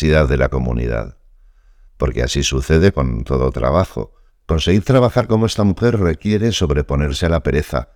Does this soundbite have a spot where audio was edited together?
yes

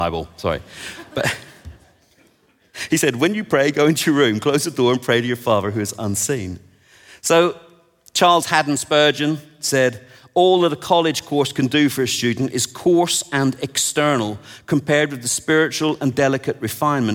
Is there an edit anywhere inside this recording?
no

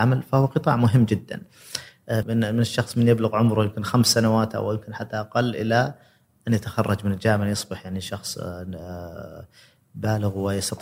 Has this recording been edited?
yes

